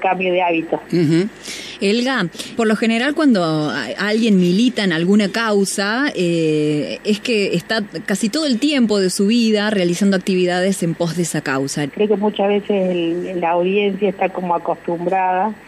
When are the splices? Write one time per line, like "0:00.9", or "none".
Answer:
0:02.6
0:11.9